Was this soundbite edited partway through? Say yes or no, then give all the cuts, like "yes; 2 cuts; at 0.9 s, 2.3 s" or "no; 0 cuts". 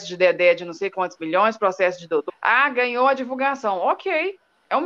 yes; 1 cut; at 2.3 s